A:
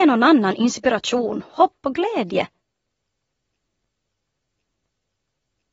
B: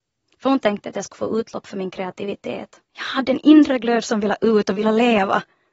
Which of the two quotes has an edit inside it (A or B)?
B